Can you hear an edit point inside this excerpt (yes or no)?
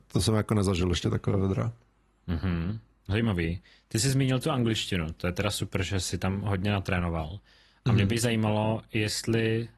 no